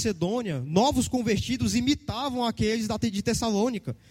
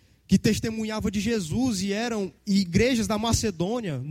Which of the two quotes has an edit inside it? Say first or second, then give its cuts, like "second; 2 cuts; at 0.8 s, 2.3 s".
second; 1 cut; at 2.4 s